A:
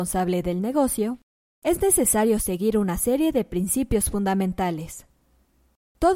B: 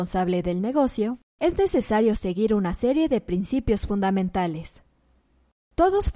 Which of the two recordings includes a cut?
B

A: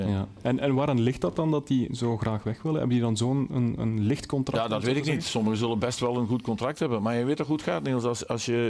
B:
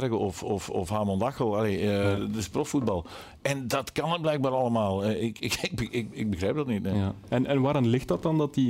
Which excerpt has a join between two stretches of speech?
B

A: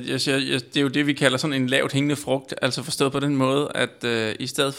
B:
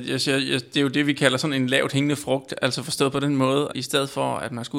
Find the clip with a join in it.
B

